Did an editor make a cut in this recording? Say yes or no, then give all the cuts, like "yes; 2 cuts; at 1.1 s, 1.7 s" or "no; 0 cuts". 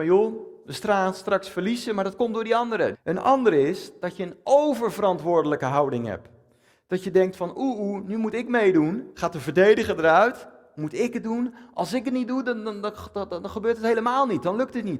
yes; 1 cut; at 2.9 s